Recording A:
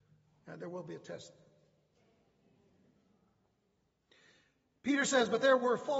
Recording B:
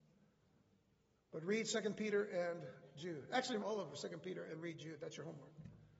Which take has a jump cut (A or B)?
B